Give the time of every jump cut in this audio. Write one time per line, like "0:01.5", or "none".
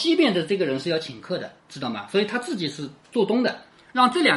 0:01.6